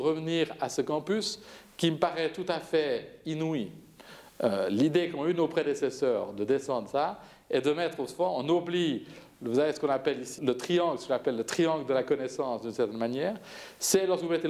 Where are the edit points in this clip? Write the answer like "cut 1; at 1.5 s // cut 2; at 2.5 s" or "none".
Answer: cut 1; at 10.4 s

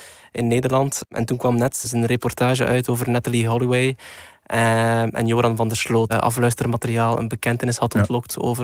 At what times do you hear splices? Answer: cut 1; at 1.8 s // cut 2; at 6.1 s

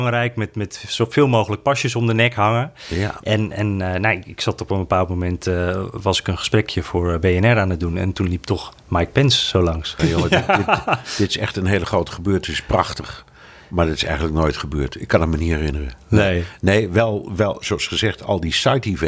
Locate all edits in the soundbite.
cut 1; at 10.0 s

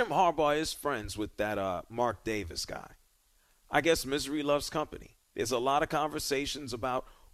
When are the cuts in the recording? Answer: cut 1; at 5.3 s

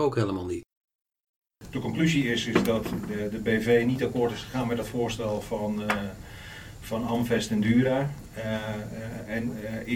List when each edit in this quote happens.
none

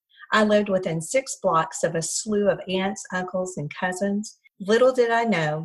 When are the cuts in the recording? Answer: none

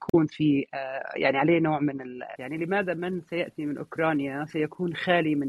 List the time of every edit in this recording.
cut 1; at 2.4 s

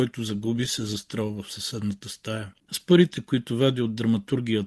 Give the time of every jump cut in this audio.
cut 1; at 2.6 s

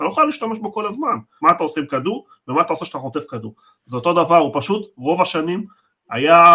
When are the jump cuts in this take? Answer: cut 1; at 1.4 s

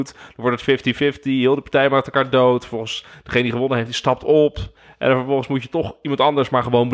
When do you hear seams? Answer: none

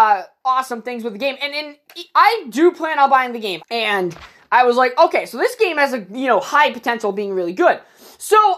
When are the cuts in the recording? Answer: cut 1; at 3.6 s

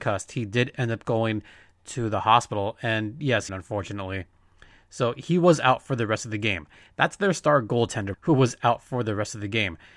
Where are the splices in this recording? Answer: cut 1; at 3.5 s // cut 2; at 8.1 s

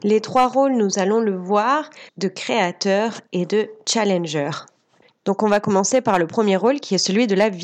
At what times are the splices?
cut 1; at 2.1 s // cut 2; at 5.1 s

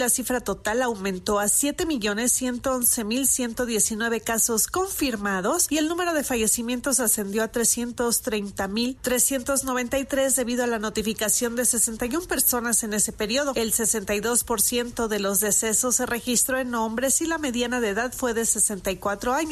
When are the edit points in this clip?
none

